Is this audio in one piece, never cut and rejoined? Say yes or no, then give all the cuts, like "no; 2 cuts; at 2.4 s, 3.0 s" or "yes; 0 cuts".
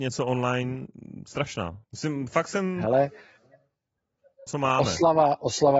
no; 2 cuts; at 1.8 s, 4.5 s